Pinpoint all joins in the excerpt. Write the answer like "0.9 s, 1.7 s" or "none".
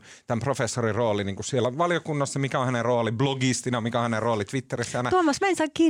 none